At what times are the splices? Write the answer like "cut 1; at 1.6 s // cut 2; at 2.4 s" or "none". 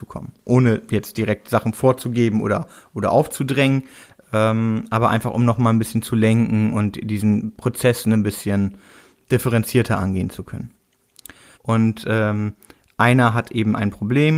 cut 1; at 11.5 s